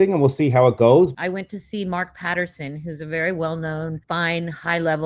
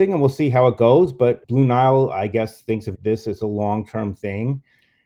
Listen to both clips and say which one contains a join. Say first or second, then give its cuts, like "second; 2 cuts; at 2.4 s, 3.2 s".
first; 1 cut; at 1.1 s